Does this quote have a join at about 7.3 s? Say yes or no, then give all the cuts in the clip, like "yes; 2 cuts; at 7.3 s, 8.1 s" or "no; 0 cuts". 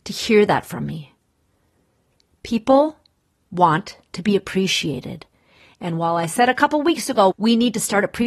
yes; 1 cut; at 7.3 s